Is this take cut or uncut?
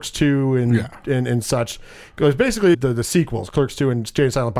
cut